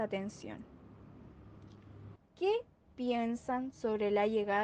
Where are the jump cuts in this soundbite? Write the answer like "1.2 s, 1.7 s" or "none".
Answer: 2.2 s